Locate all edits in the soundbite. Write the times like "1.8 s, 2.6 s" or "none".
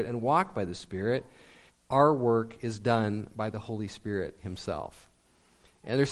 1.7 s